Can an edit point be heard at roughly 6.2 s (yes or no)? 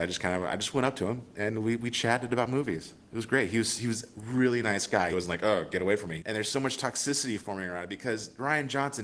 yes